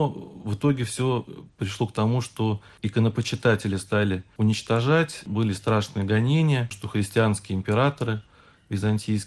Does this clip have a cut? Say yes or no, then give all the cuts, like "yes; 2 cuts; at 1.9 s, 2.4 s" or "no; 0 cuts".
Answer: yes; 1 cut; at 6.7 s